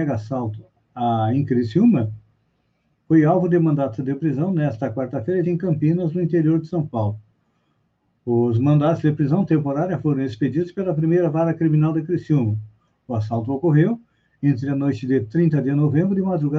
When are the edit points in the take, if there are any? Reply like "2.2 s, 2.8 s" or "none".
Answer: 5.4 s